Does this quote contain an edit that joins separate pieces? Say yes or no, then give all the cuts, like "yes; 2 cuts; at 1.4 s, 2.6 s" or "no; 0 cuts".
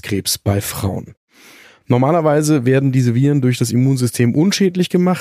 no; 0 cuts